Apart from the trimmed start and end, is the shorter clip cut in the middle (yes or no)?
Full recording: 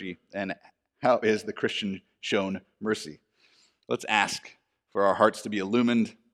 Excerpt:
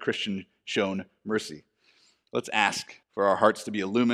yes